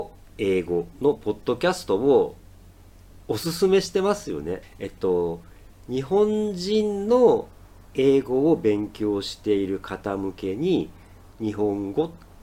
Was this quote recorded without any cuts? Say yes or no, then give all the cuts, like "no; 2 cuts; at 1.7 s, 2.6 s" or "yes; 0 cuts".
no; 2 cuts; at 4.6 s, 11.3 s